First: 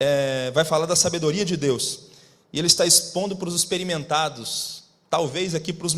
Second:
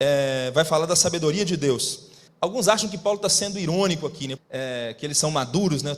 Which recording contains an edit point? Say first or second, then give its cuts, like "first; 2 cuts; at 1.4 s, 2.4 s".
second; 2 cuts; at 2.3 s, 4.4 s